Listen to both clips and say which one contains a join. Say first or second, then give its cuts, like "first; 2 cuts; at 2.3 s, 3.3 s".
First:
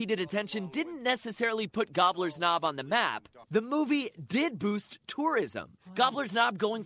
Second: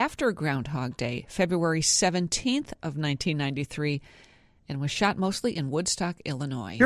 first; 1 cut; at 3.5 s